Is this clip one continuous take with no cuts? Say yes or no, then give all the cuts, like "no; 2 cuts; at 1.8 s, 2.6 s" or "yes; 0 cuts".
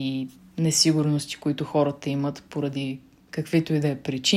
yes; 0 cuts